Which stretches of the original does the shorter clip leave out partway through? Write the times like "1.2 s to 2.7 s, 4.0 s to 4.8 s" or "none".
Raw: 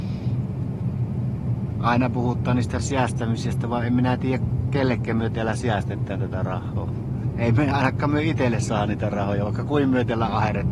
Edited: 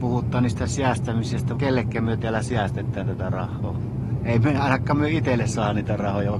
3.7 s to 4.7 s